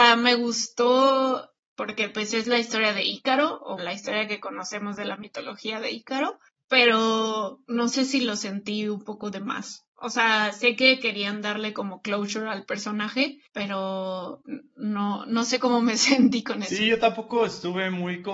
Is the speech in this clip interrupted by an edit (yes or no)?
yes